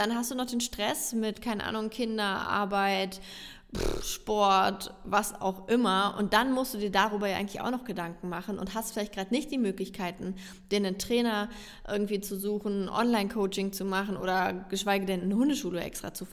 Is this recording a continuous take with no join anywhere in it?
yes; 0 cuts

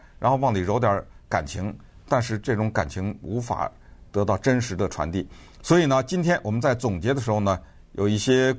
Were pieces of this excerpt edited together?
no; 0 cuts

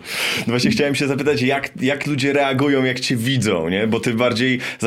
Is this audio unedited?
yes; 0 cuts

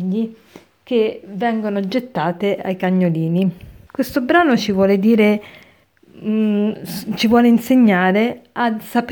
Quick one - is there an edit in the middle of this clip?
yes; 1 cut; at 3.9 s

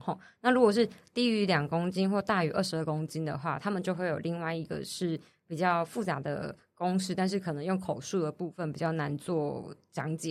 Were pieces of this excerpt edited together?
no; 0 cuts

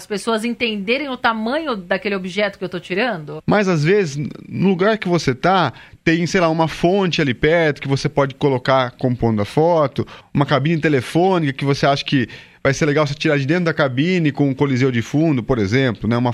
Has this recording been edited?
yes; 2 cuts; at 3.4 s, 10.2 s

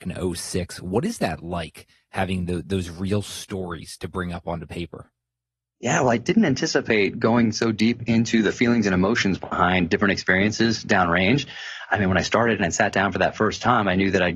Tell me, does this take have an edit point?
no; 0 cuts

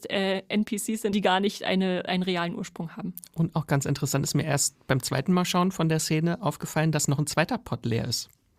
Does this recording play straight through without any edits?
no; 1 cut; at 1.1 s

